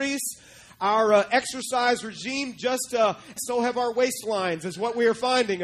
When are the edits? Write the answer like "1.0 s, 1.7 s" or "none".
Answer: 3.4 s